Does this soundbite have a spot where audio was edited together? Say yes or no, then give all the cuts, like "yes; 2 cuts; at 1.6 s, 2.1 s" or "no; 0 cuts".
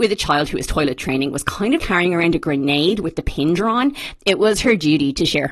yes; 2 cuts; at 1.8 s, 4.2 s